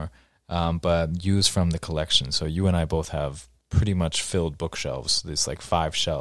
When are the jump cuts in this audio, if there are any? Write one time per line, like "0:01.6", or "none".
none